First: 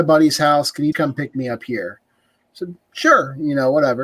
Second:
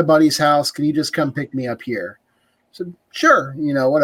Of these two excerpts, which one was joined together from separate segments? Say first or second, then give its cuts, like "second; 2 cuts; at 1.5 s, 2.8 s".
first; 1 cut; at 0.9 s